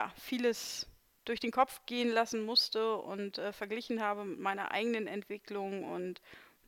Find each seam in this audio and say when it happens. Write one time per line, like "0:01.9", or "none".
none